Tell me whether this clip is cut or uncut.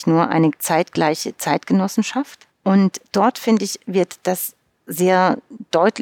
cut